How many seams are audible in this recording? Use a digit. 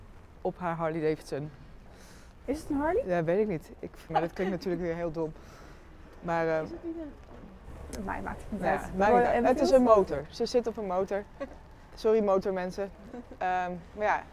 1